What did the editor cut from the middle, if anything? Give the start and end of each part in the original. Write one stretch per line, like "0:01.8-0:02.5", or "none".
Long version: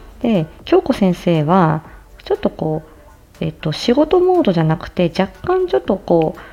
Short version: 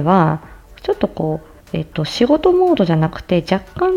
0:03.0-0:03.3